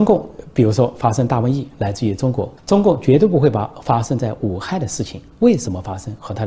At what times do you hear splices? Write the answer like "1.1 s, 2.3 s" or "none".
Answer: 2.6 s

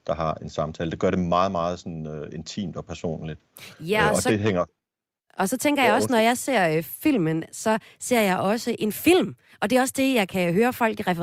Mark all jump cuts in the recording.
none

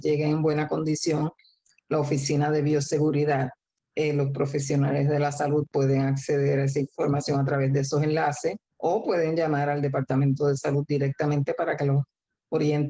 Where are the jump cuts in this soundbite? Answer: 3.8 s, 8.6 s

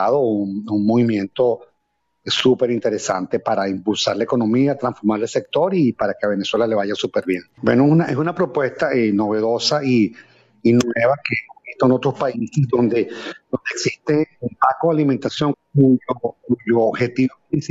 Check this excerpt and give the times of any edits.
7.6 s, 15.5 s

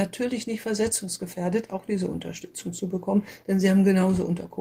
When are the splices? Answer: 1.7 s

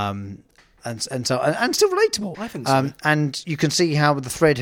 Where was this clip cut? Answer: 2.3 s

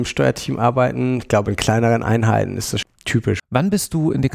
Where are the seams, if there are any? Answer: 1.4 s, 2.8 s

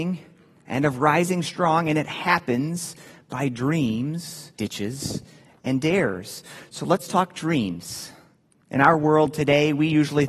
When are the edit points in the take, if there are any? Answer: 4.5 s

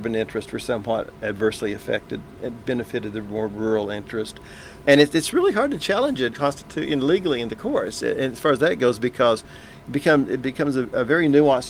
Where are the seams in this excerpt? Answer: 4.8 s, 6.3 s

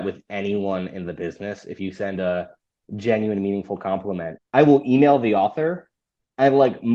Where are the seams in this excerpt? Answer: 4.4 s

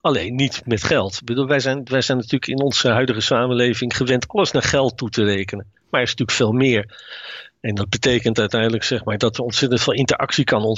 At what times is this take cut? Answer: none

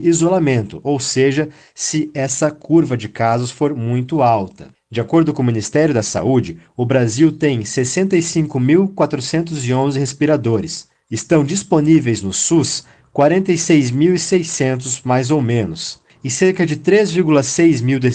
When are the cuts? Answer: none

